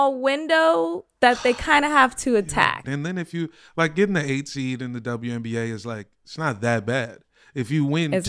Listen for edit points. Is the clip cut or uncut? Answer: cut